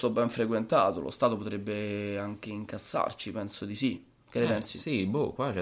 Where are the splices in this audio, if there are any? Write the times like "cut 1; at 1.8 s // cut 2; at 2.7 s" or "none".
none